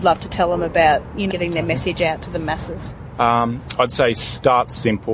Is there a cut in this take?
yes; 1 cut; at 1.3 s

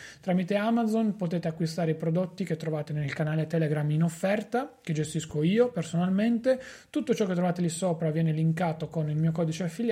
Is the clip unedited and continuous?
yes; 0 cuts

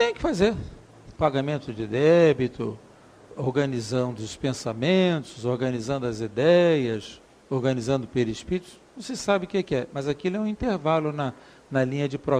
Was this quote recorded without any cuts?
no; 1 cut; at 1.1 s

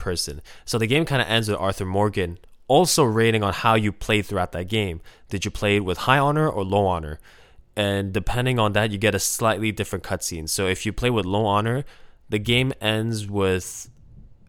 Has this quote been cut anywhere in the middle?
no; 0 cuts

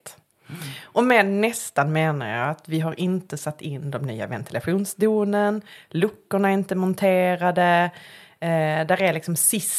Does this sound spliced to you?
no; 0 cuts

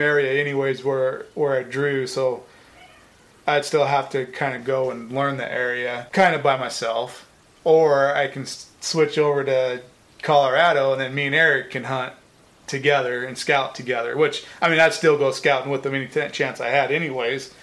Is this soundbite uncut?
yes; 0 cuts

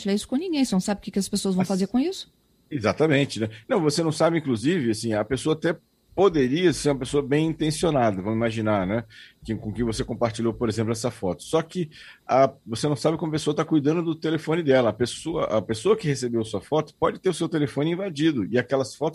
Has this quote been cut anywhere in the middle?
no; 0 cuts

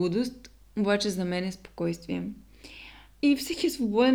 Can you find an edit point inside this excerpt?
no; 0 cuts

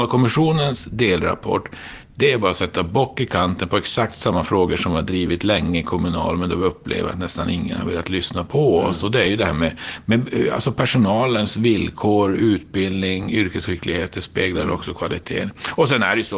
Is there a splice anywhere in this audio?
no; 0 cuts

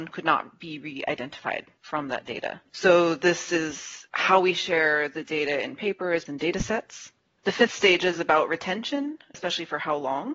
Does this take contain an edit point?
yes; 3 cuts; at 2.7 s, 6.3 s, 9.3 s

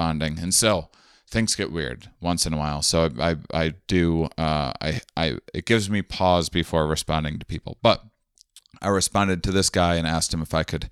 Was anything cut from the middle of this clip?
no; 0 cuts

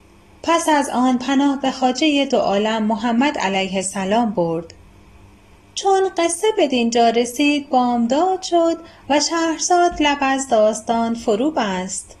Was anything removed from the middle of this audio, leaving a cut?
no; 0 cuts

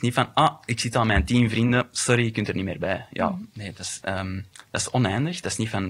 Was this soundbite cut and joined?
no; 0 cuts

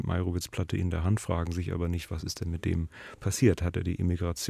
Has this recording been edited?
no; 0 cuts

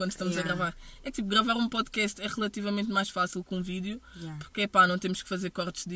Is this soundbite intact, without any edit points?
yes; 0 cuts

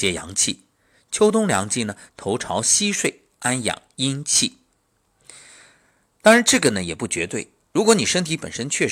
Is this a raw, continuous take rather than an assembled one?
yes; 0 cuts

